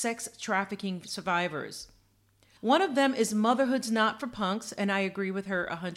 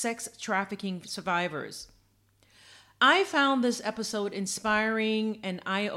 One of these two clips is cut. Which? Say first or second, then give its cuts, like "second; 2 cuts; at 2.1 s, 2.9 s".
first; 1 cut; at 2.6 s